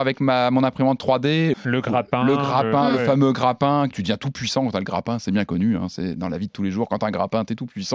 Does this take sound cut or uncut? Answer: cut